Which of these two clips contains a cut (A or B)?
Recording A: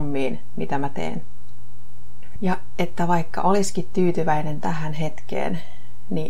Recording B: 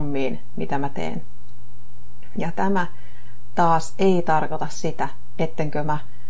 A